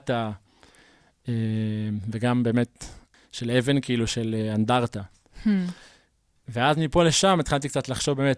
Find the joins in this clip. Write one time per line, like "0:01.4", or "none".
0:03.1